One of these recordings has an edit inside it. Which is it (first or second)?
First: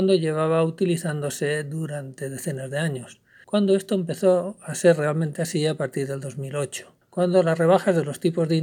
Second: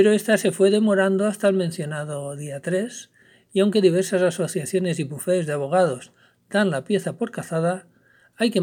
first